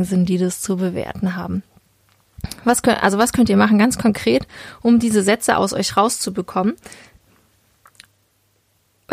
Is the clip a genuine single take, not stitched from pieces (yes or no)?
yes